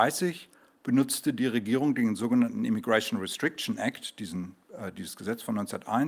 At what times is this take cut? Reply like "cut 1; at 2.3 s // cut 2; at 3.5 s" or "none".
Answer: none